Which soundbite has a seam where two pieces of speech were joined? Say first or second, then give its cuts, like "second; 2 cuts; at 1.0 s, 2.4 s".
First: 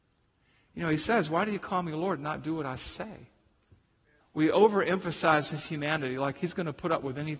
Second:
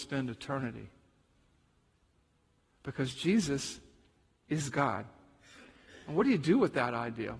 first; 1 cut; at 4.2 s